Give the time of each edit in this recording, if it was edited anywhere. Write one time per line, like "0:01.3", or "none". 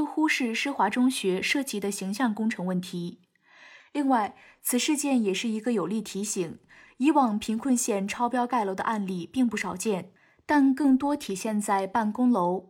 0:03.8